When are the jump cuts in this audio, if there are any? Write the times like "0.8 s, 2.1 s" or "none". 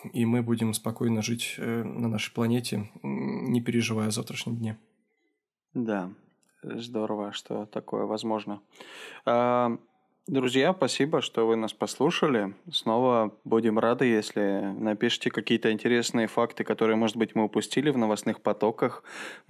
none

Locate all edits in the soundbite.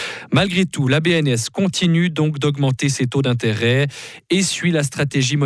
none

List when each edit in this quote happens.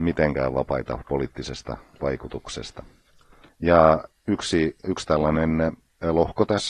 3.5 s, 4.8 s

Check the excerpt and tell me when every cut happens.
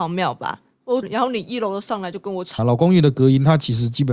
1.0 s, 2.6 s

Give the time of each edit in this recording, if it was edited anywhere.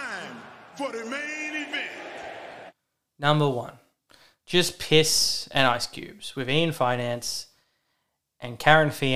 none

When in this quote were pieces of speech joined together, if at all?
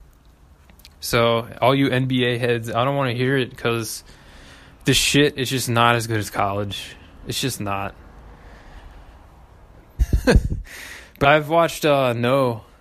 10.0 s, 11.2 s

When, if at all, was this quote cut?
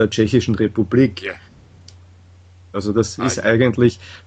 2.7 s

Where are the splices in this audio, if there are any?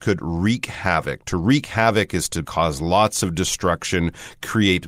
2.4 s

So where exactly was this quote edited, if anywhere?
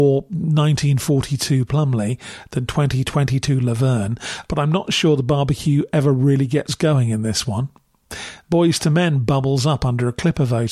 4.4 s, 8.4 s

